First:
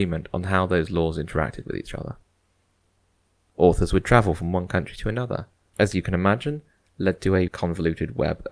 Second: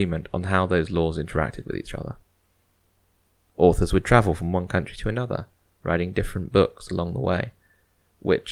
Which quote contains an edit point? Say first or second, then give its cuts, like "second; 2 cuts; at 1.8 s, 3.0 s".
first; 2 cuts; at 5.7 s, 7.5 s